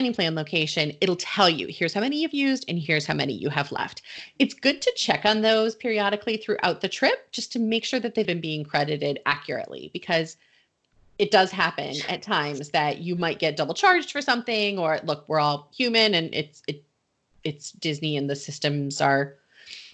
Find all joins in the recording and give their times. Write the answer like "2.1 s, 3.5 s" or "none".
8.2 s

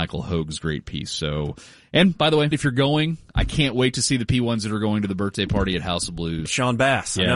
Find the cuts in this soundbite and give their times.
2.5 s, 6.5 s

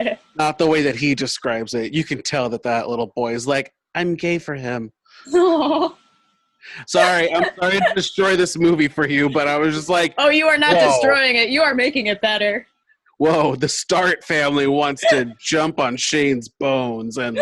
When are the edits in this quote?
none

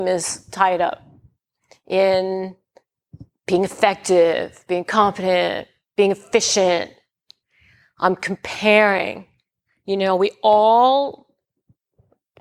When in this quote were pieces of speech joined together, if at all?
none

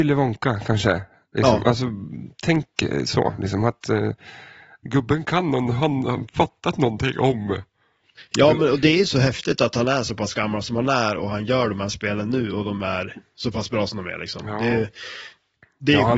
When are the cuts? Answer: none

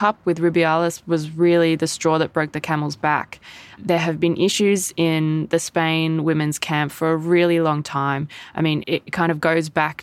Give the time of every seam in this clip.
8.8 s

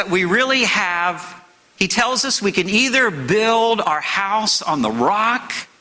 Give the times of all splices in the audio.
1.8 s

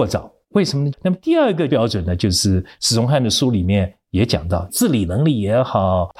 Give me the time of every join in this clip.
0.9 s, 4.7 s

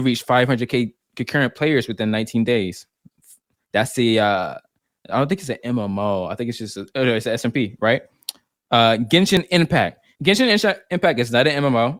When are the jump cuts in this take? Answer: 10.1 s

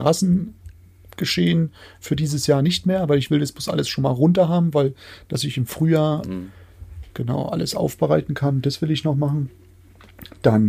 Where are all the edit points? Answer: 6.2 s

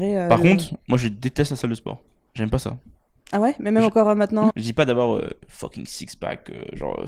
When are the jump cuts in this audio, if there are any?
4.5 s

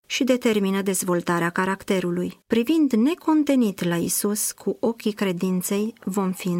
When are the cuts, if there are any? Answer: 2.4 s

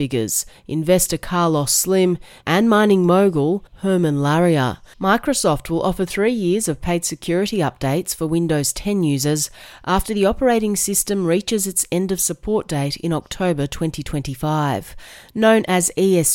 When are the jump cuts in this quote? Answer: 4.9 s

